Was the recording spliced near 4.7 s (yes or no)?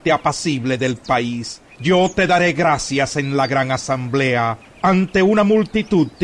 no